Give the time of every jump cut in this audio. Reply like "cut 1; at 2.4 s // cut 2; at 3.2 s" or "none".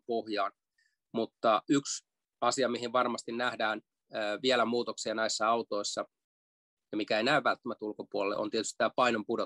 none